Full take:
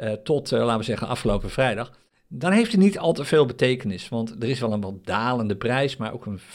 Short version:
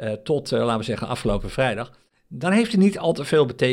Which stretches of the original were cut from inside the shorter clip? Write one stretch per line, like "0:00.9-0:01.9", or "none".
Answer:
none